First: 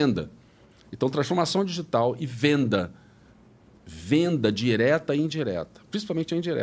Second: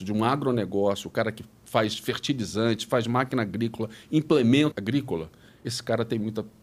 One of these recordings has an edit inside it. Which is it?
second; 1 cut; at 4.7 s

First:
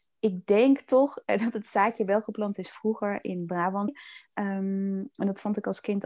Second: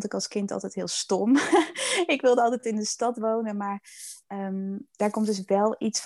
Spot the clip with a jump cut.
first; 1 cut; at 3.9 s

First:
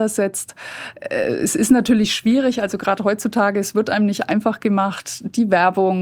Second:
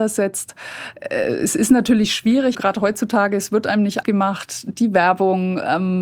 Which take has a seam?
second; 2 cuts; at 2.5 s, 4.0 s

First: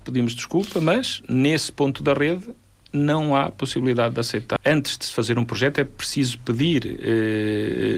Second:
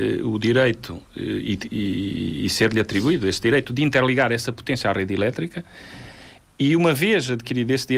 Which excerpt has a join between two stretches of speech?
first; 1 cut; at 4.6 s

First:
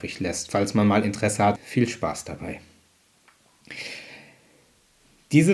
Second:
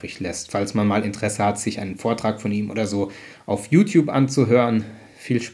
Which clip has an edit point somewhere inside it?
first; 1 cut; at 1.6 s

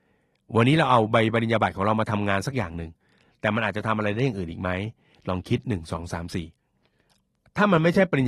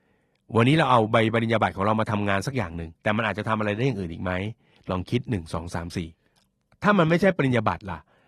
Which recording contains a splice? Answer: second; 2 cuts; at 3.0 s, 6.1 s

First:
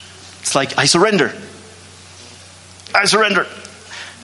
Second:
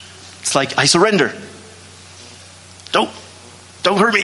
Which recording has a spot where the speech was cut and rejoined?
first; 1 cut; at 2.9 s

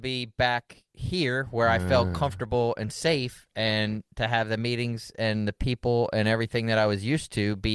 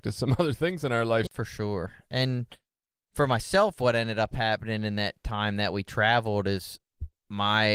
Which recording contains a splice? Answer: second; 1 cut; at 1.3 s

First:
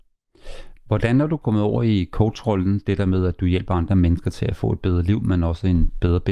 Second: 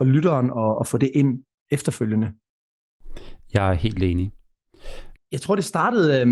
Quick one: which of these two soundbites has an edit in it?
second; 1 cut; at 5.2 s

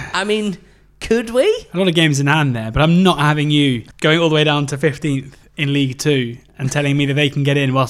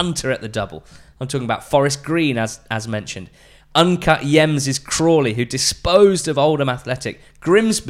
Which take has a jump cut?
first; 1 cut; at 3.9 s

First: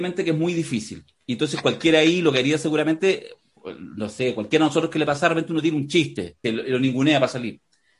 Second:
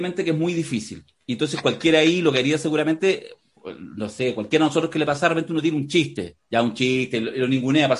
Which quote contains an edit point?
first; 1 cut; at 6.4 s

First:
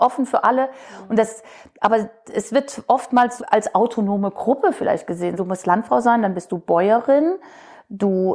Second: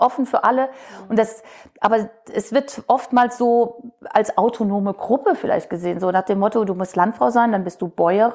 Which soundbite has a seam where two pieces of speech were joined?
first; 2 cuts; at 3.4 s, 5.4 s

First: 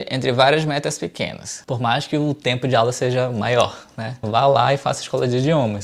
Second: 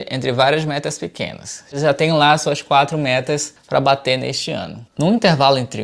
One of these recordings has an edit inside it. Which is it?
first; 2 cuts; at 1.6 s, 4.2 s

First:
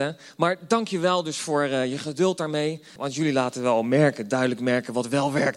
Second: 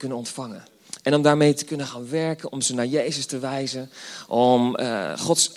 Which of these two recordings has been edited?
first; 1 cut; at 3.0 s

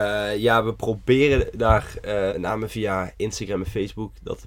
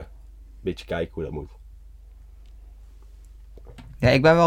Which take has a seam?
first; 1 cut; at 2.3 s

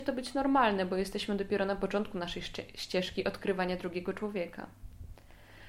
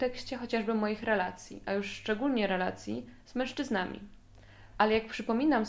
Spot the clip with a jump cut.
second; 1 cut; at 4.7 s

